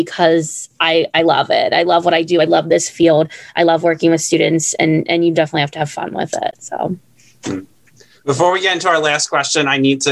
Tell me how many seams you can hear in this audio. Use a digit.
0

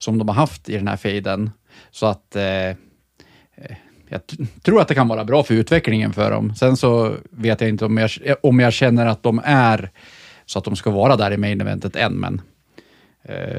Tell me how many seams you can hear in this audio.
0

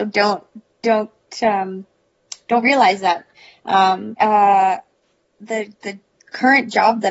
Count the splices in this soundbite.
2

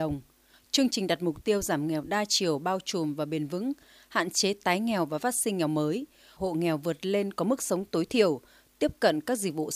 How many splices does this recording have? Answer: 1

